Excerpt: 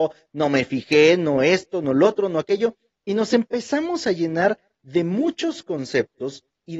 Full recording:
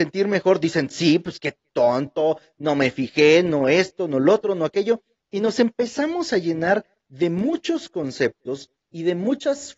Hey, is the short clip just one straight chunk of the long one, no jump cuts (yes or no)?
yes